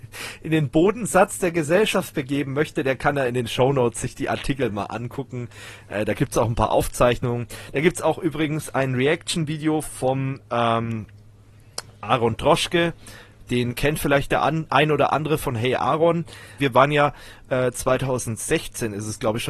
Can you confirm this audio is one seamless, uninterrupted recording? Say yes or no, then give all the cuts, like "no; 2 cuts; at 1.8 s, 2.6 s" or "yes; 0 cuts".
no; 1 cut; at 16.6 s